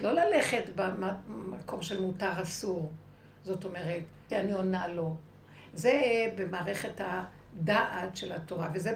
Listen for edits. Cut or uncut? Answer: cut